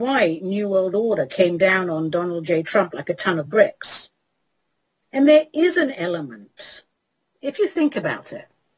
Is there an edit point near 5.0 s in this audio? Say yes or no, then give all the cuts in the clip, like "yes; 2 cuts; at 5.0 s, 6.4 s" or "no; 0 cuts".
yes; 1 cut; at 5.0 s